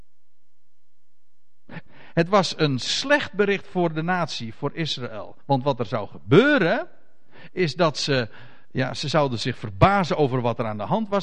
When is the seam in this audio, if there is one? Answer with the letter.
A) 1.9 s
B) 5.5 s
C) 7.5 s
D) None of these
A